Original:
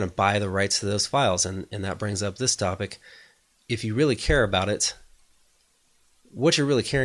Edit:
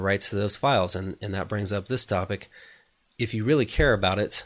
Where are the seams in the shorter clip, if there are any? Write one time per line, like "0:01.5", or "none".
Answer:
none